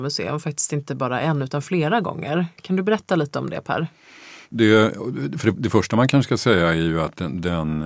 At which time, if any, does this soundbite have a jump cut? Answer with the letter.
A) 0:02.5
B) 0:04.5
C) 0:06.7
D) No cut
B